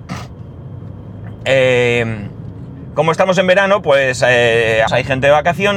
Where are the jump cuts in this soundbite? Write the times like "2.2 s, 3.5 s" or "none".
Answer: 4.9 s